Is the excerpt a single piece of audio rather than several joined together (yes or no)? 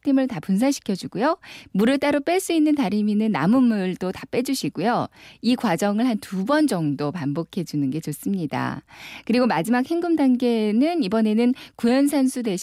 no